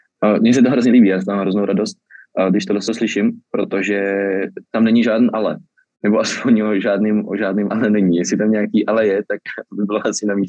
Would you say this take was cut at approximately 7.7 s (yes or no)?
yes